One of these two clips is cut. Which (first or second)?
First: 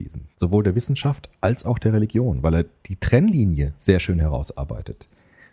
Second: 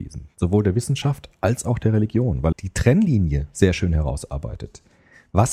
second